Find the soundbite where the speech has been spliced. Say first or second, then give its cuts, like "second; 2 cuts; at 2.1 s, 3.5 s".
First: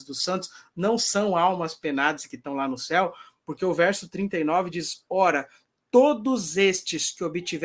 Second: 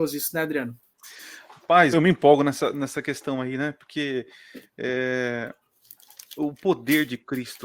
second; 1 cut; at 1.9 s